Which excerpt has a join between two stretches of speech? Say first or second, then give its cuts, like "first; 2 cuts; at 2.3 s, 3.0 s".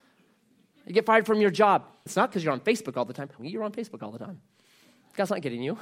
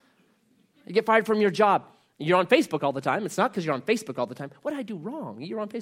first; 2 cuts; at 2.1 s, 3.4 s